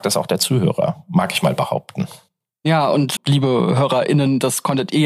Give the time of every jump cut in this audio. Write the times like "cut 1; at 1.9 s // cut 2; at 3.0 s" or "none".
cut 1; at 3.2 s